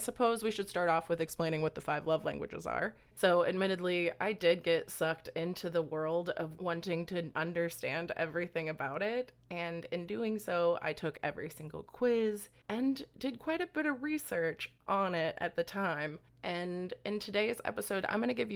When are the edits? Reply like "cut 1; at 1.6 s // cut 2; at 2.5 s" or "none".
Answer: cut 1; at 3.1 s